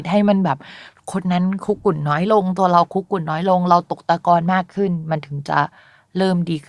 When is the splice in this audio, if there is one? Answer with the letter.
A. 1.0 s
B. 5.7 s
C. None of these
C